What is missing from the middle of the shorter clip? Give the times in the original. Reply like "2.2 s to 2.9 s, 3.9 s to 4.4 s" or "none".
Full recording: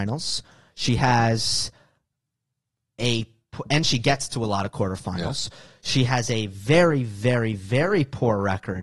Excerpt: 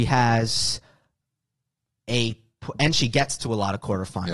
none